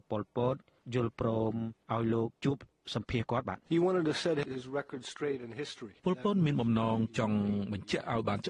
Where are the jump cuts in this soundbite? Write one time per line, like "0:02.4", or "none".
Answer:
0:03.7

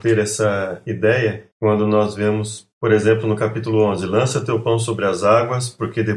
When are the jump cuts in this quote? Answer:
none

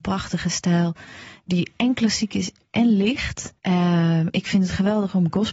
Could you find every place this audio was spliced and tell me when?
0:03.6

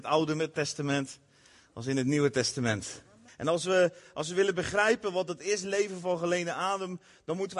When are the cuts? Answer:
0:03.3

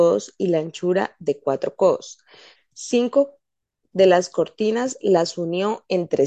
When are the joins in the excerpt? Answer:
0:02.5

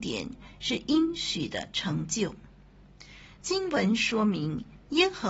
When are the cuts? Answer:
none

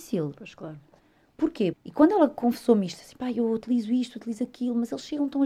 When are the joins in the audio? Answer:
0:01.7

